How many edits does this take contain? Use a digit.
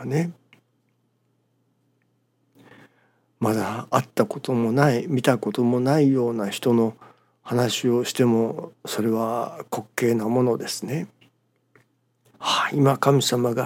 1